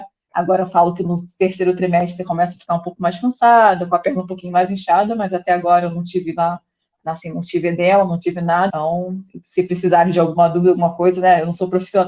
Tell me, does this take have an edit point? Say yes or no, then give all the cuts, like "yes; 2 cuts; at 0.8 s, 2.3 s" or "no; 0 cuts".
yes; 1 cut; at 8.7 s